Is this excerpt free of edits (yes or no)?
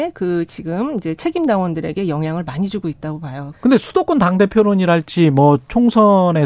no